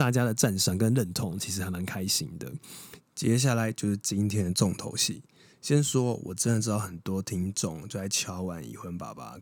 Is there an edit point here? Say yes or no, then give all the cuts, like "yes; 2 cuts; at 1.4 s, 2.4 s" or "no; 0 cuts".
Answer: yes; 1 cut; at 3.0 s